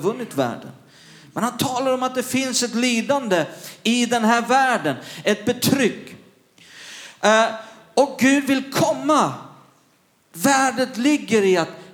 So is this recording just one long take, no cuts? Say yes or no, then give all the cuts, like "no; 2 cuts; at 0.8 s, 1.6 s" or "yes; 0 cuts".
yes; 0 cuts